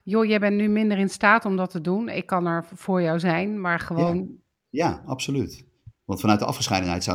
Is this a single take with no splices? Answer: no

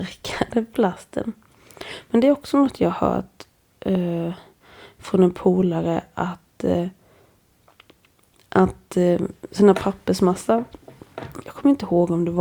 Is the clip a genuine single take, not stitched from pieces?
yes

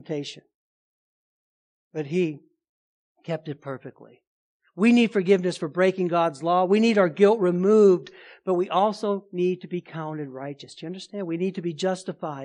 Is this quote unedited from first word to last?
yes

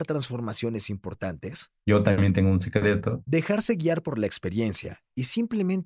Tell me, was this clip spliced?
yes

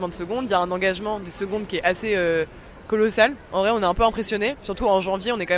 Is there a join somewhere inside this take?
no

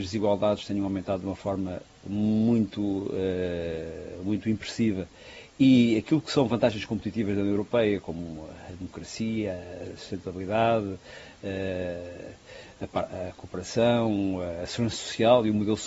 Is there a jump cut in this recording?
no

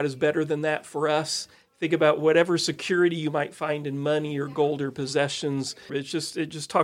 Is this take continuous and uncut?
no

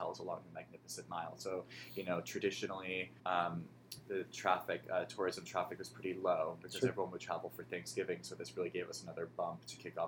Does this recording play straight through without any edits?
no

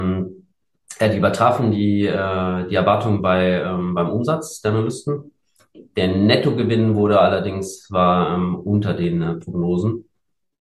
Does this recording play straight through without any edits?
yes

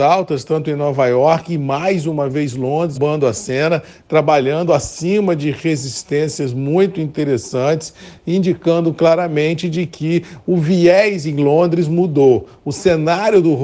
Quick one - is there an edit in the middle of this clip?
yes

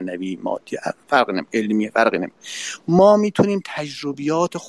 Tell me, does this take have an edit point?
no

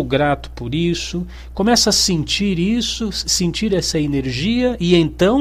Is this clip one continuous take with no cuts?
yes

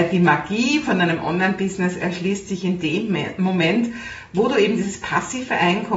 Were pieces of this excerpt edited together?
no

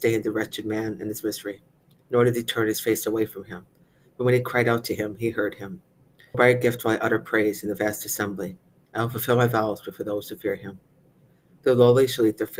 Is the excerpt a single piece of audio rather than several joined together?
no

